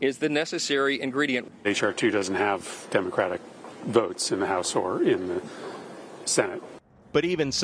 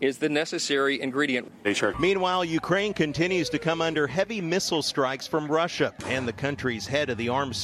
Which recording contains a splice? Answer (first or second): second